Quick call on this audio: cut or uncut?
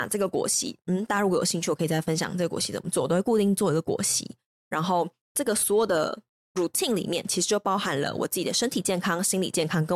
uncut